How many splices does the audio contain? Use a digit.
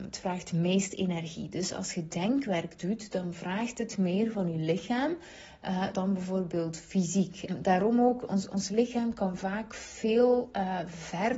2